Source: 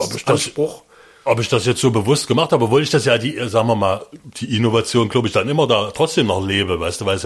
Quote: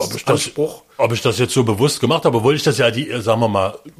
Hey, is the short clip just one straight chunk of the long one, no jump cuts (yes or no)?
no